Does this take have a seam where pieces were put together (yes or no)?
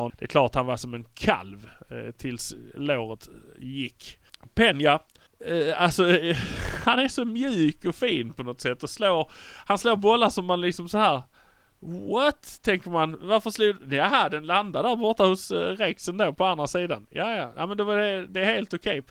no